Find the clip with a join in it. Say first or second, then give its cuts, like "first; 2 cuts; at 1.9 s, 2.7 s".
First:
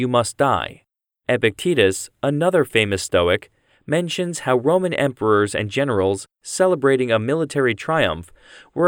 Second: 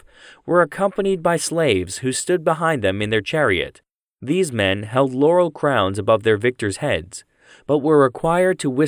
first; 1 cut; at 1.2 s